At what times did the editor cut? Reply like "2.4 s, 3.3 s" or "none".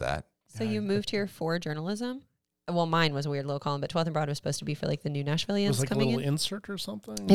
2.5 s

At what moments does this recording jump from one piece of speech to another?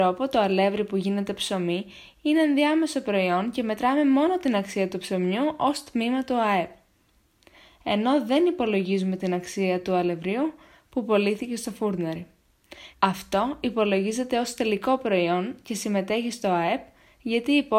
12.9 s

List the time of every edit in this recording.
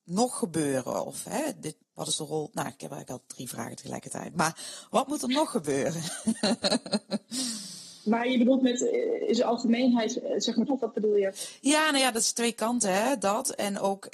1.8 s, 10.7 s

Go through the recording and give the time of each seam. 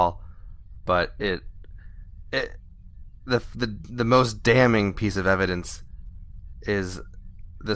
none

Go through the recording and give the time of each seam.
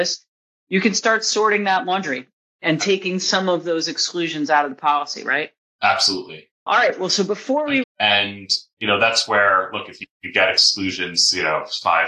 6.7 s, 7.8 s

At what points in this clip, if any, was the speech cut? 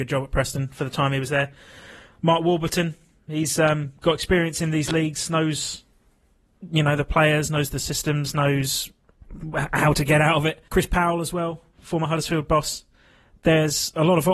10.7 s

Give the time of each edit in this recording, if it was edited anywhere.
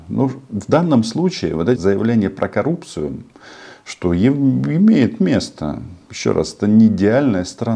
1.8 s

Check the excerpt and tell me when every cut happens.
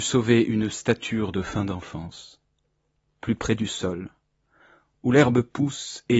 none

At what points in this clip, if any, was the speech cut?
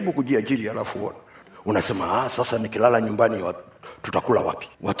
none

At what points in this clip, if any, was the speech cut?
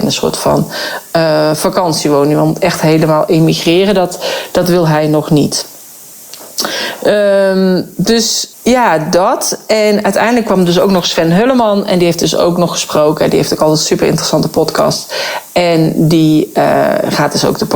8.5 s

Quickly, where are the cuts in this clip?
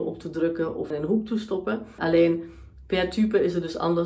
0.9 s, 2.0 s

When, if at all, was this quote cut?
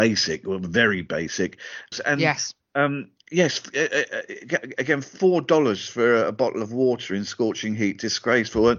1.9 s

